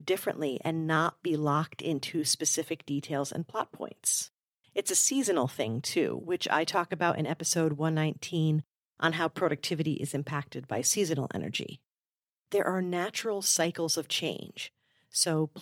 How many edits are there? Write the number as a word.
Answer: one